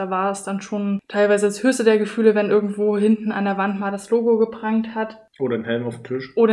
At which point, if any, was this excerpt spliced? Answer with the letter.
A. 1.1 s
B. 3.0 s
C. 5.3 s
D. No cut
D